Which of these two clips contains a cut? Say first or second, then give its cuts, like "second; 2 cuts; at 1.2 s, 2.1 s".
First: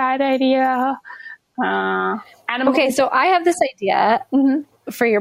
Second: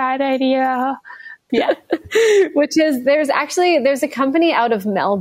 second; 1 cut; at 1.5 s